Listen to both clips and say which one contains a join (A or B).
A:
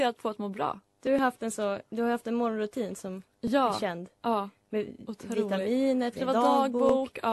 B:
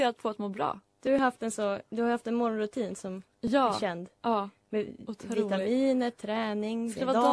A